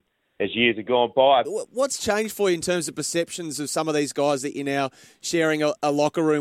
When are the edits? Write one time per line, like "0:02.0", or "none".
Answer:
0:01.4